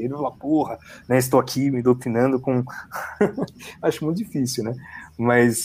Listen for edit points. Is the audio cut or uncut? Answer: uncut